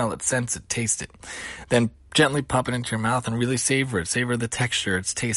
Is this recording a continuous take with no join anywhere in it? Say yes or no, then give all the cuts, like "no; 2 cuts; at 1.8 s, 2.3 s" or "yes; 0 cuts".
yes; 0 cuts